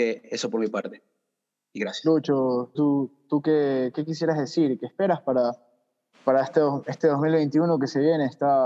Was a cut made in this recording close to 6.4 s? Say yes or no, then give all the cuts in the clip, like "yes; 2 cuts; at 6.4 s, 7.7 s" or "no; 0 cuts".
no; 1 cut; at 2.7 s